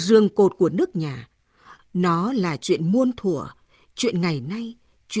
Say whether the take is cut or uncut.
cut